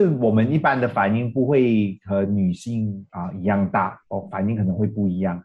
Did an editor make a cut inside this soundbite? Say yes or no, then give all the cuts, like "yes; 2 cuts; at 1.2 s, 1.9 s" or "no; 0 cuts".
no; 0 cuts